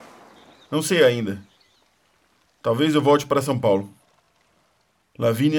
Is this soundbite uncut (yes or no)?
yes